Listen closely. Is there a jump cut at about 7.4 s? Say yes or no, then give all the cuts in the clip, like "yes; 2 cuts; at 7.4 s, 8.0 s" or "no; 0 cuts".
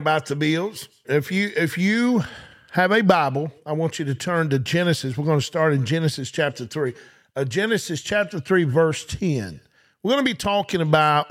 no; 1 cut; at 1.0 s